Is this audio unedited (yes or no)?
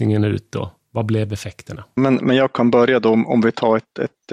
no